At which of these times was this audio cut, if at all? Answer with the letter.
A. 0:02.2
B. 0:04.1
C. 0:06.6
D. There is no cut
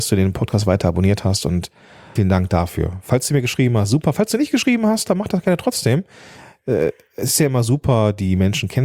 A